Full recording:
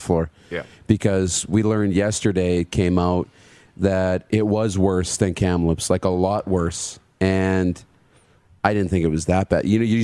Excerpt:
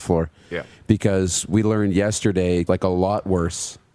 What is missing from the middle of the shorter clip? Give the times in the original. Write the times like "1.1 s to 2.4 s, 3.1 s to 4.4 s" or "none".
2.7 s to 5.9 s